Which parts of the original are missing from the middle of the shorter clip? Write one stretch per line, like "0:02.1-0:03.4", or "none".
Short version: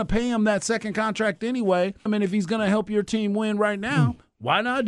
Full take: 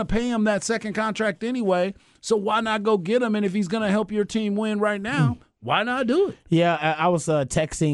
0:02.1-0:03.3